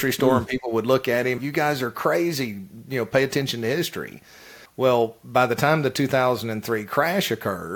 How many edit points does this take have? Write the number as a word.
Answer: two